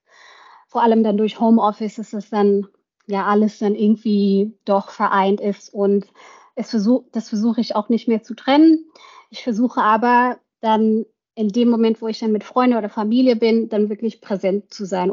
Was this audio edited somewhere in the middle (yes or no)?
no